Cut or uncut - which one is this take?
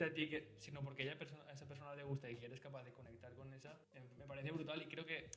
cut